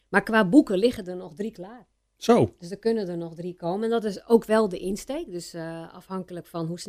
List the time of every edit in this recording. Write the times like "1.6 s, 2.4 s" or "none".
none